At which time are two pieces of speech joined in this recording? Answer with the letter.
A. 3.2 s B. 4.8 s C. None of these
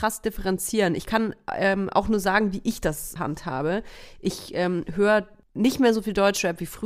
A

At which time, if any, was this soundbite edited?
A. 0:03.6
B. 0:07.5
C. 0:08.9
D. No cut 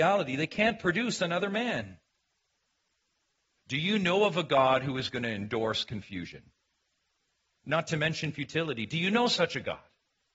A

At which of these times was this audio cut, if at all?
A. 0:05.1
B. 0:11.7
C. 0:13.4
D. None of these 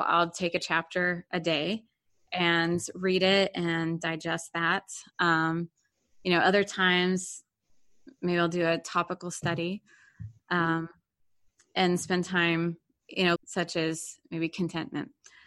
C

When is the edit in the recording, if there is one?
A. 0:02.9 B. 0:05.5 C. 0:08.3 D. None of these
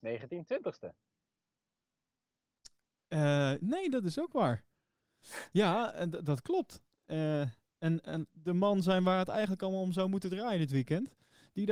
C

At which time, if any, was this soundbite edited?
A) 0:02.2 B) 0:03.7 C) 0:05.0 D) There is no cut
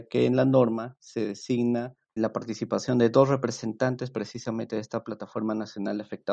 A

